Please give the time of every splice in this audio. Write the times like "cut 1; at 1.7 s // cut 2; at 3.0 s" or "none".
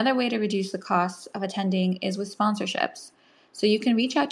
none